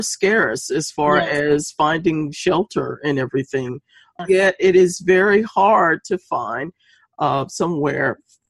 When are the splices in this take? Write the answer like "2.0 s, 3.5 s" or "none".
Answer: 4.2 s